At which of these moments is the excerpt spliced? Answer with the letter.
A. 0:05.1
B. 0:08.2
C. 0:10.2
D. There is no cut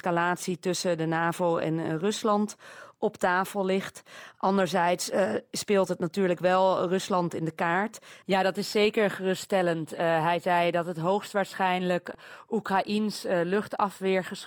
B